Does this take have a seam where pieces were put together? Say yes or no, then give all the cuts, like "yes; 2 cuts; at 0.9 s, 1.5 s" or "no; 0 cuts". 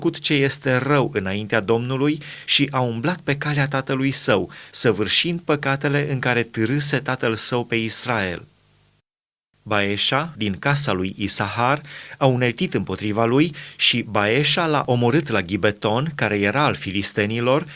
yes; 1 cut; at 10.4 s